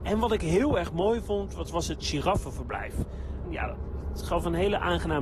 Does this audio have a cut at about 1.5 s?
no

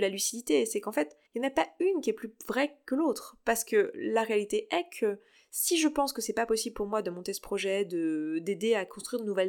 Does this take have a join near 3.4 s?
no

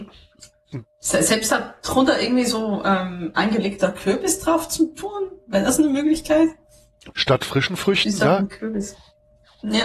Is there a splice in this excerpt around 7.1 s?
yes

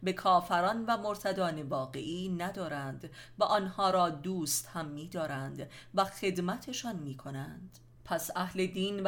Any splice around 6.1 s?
no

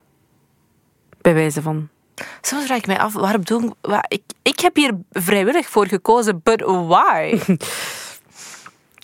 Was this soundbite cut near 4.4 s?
no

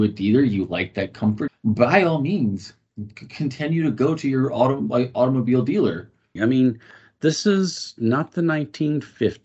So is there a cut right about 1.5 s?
yes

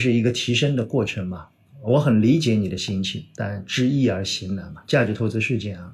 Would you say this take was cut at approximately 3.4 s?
yes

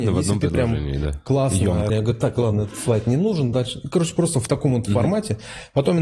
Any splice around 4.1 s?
no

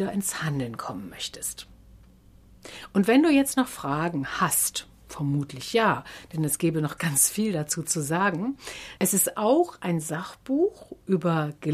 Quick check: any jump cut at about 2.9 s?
no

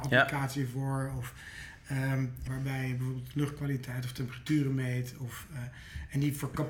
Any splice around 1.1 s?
no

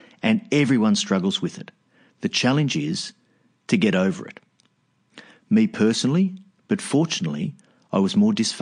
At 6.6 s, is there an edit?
yes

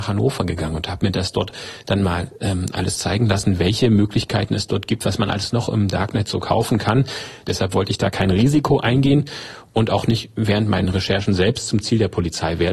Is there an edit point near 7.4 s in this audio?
yes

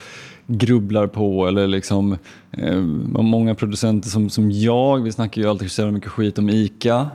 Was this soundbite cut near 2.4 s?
no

